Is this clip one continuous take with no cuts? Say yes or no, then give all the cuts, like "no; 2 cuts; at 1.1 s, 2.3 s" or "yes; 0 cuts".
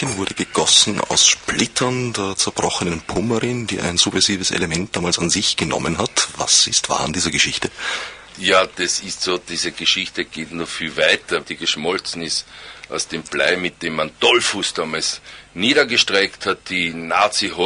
no; 1 cut; at 11.4 s